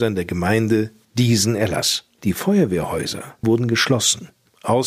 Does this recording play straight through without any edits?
no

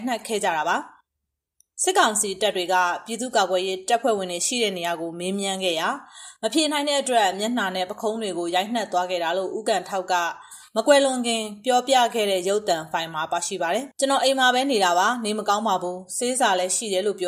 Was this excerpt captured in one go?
no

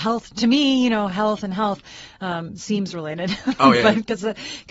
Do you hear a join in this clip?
no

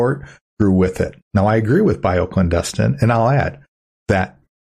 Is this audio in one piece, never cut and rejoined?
no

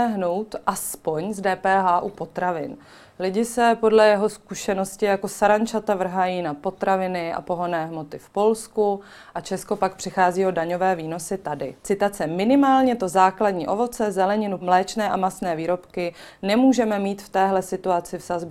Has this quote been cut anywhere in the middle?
yes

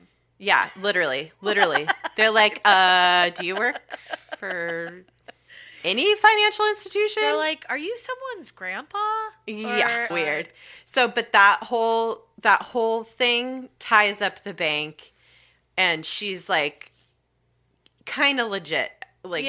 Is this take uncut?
no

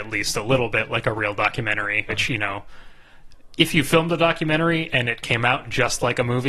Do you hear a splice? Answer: yes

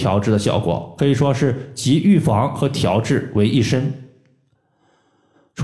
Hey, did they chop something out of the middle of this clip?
no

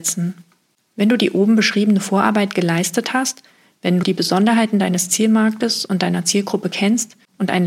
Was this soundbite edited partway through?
yes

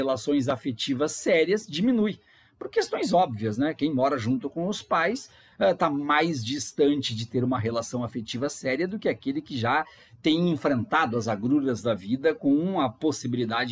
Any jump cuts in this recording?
no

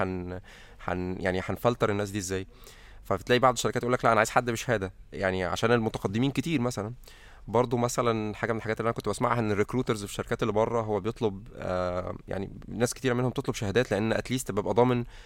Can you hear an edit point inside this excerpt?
no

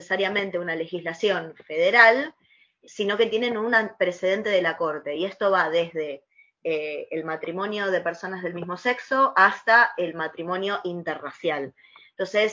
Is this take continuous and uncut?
yes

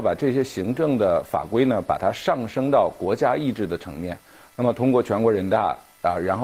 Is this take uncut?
yes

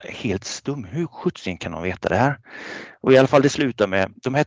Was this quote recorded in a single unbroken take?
yes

